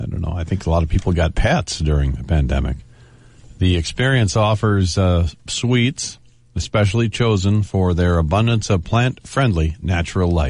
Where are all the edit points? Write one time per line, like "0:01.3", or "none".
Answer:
none